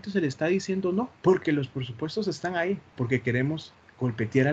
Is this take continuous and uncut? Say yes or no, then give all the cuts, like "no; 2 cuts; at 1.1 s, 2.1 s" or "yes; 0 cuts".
no; 2 cuts; at 1.2 s, 3.0 s